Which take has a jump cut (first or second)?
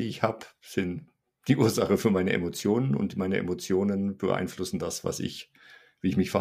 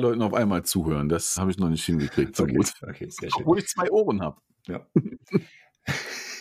second